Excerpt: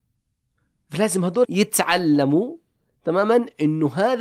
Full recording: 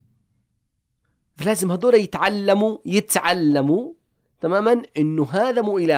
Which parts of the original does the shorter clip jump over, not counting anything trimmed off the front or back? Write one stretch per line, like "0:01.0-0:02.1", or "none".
0:01.9-0:02.8